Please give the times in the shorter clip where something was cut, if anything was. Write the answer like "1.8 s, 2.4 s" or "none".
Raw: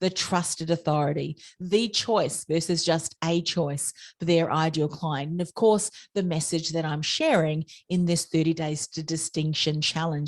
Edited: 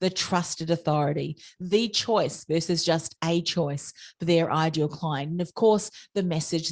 none